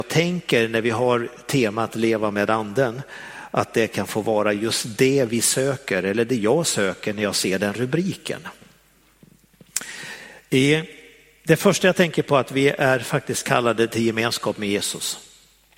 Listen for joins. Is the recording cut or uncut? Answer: uncut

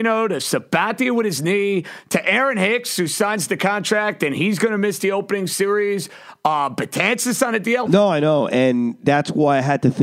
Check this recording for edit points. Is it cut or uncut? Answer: cut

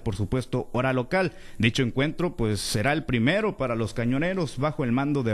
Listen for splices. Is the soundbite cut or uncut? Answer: uncut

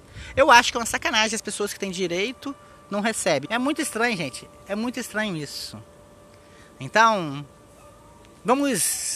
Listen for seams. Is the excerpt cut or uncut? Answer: cut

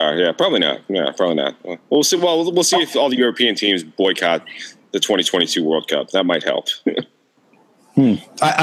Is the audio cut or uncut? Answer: uncut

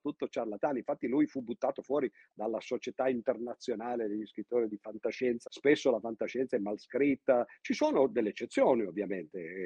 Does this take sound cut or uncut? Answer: cut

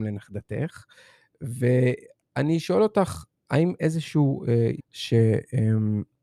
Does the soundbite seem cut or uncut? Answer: cut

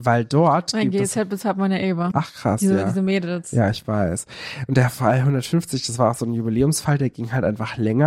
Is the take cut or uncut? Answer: cut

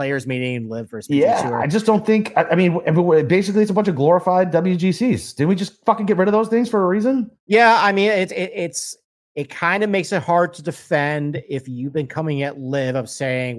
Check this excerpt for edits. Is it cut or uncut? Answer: uncut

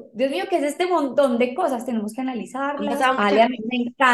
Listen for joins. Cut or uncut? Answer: uncut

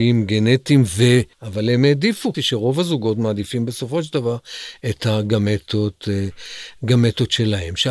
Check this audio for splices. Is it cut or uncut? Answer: cut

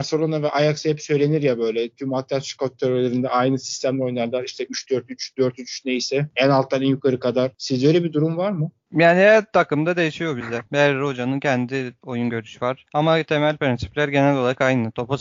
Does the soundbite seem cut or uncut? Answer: uncut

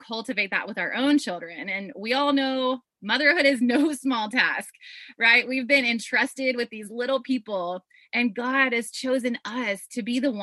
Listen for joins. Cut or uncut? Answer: uncut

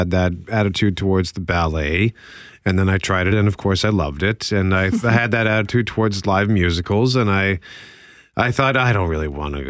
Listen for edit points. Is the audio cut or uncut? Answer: uncut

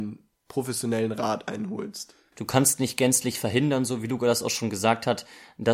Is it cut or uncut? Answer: cut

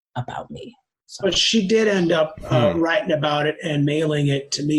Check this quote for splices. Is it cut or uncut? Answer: uncut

